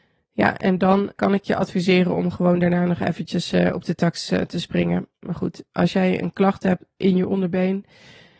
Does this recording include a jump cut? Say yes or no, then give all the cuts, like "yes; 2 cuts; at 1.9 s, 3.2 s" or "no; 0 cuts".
yes; 2 cuts; at 1.1 s, 5.2 s